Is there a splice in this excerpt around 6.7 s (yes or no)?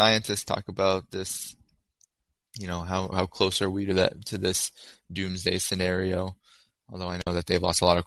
no